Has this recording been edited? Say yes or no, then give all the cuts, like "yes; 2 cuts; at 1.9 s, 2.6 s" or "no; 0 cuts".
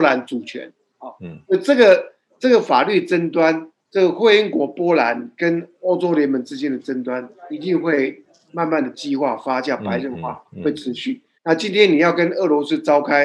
yes; 2 cuts; at 3.8 s, 11.3 s